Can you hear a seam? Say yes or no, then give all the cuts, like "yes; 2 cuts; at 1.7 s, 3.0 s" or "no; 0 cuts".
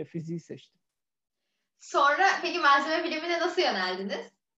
no; 0 cuts